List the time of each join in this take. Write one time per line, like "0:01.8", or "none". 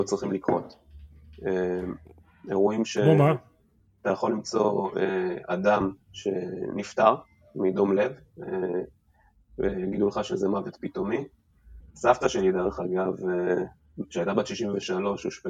0:11.8